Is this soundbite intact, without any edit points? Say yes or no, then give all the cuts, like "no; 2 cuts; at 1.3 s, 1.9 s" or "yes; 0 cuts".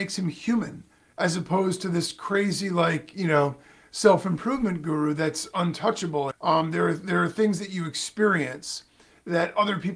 no; 1 cut; at 6.3 s